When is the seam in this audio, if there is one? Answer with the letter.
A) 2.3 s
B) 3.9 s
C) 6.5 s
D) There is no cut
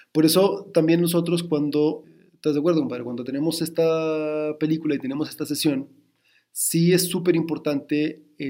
D